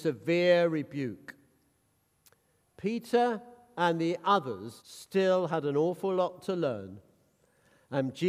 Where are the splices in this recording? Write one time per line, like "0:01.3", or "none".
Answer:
0:04.8